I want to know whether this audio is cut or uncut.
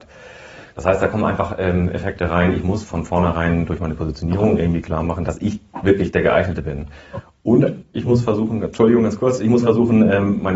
uncut